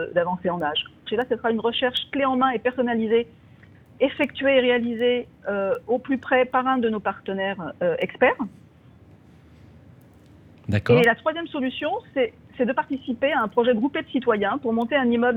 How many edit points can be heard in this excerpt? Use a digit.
1